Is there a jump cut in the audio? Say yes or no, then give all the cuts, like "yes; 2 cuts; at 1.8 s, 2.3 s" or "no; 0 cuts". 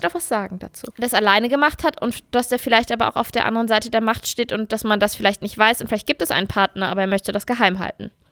yes; 1 cut; at 0.9 s